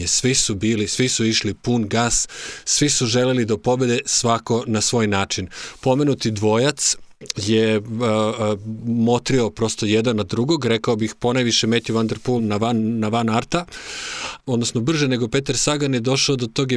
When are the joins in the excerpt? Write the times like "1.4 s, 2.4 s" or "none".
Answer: 12.4 s, 14.4 s